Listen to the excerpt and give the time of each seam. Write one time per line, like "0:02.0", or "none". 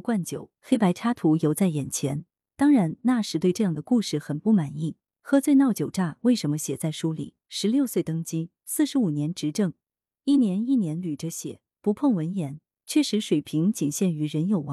0:07.4

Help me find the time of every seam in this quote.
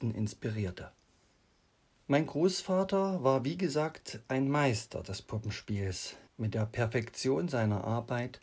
0:01.9
0:06.3

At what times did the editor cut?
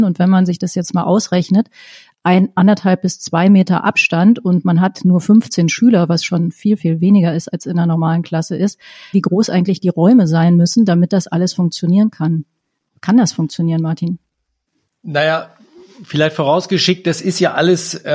0:09.1

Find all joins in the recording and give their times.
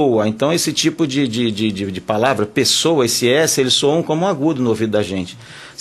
none

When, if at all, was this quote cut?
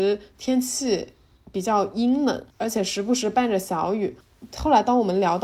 0:02.5

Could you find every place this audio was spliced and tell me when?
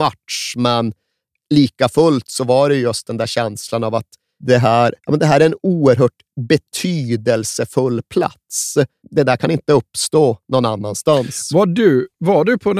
0:05.0
0:09.0

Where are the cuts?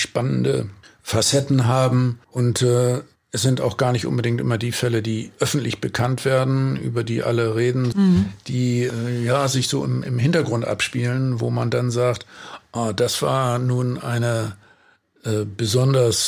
0:07.9

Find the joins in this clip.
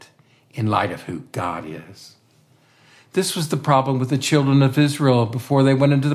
none

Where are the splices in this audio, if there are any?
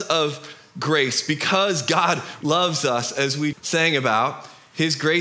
0:02.4
0:03.5

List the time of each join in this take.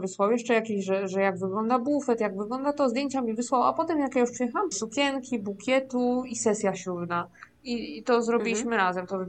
0:04.7

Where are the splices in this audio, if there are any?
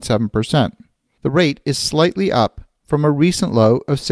0:01.2

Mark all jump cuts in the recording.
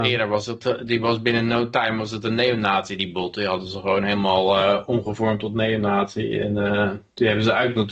none

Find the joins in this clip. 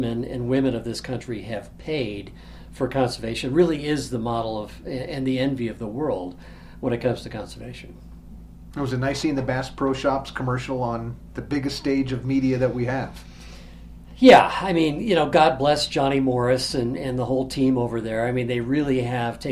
none

